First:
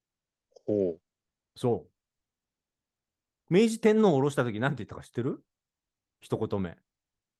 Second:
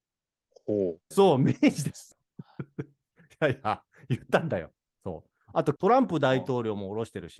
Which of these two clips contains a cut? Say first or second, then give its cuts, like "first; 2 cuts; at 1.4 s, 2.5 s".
second; 3 cuts; at 1.1 s, 2.1 s, 5.8 s